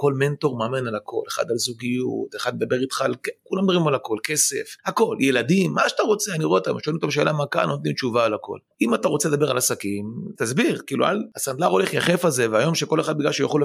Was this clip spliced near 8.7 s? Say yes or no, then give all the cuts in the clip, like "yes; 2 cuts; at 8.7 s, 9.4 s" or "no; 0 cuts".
yes; 2 cuts; at 8.7 s, 10.4 s